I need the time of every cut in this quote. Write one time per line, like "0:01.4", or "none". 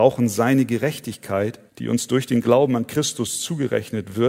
0:01.7